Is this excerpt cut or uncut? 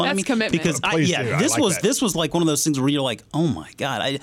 uncut